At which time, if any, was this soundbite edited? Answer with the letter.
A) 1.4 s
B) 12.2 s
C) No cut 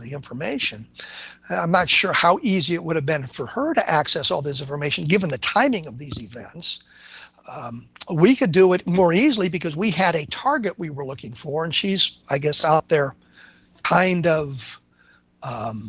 C